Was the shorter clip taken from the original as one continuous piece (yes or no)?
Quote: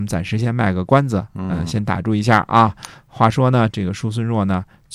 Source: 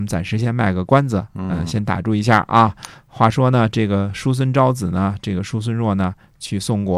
no